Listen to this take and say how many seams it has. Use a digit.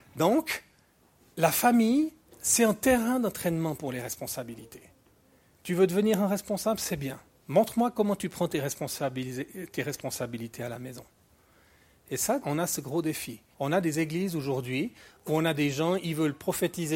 3